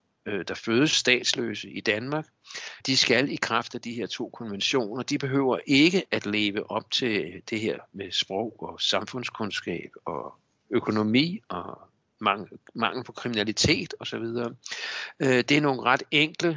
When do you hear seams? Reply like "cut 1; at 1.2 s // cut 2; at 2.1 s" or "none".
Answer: cut 1; at 2.8 s

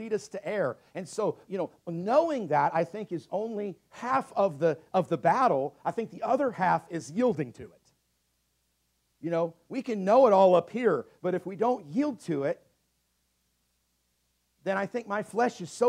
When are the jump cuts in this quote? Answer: cut 1; at 1.5 s

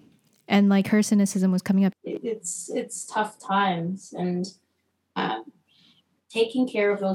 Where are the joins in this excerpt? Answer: cut 1; at 1.9 s

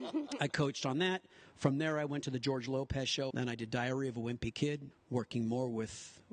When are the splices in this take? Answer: cut 1; at 3.3 s // cut 2; at 4.9 s

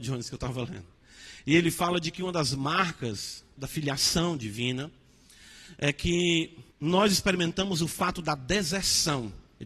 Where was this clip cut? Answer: cut 1; at 3.6 s // cut 2; at 6.7 s

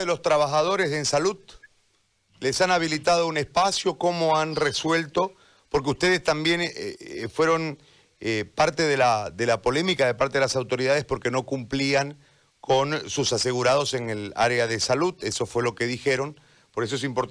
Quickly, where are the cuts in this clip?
none

